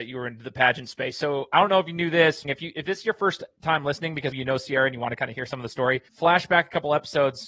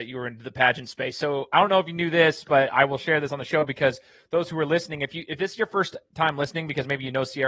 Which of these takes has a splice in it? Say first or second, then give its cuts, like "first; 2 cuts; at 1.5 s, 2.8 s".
first; 3 cuts; at 2.4 s, 4.3 s, 6.1 s